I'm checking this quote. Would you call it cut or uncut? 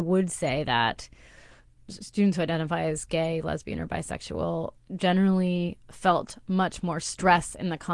uncut